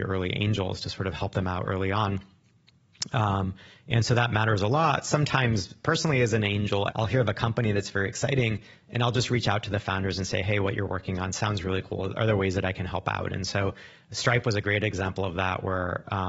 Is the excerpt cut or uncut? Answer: cut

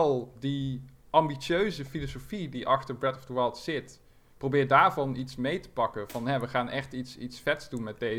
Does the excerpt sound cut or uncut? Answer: uncut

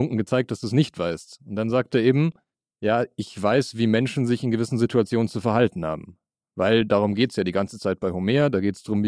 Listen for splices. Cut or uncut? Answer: uncut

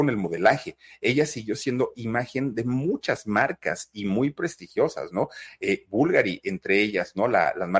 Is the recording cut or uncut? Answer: uncut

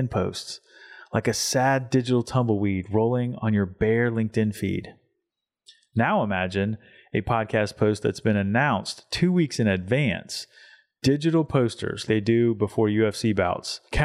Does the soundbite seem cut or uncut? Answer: cut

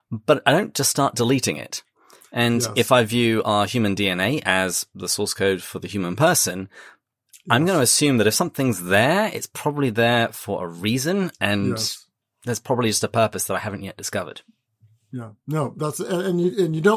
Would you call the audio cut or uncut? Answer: uncut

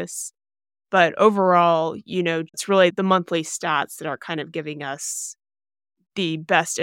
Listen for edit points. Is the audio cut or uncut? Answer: cut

